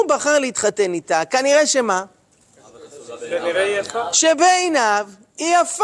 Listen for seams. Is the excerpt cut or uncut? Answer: uncut